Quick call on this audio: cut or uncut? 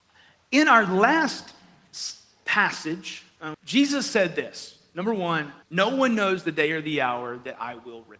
cut